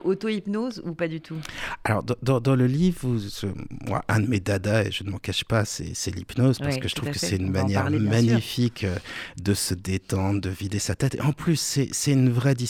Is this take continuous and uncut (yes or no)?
yes